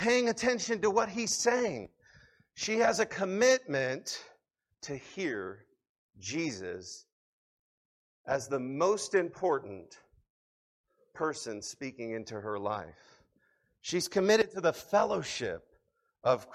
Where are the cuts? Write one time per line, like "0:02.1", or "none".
none